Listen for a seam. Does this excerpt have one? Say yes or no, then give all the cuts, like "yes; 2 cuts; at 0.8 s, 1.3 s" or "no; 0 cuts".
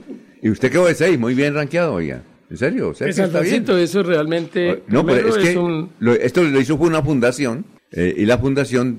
no; 0 cuts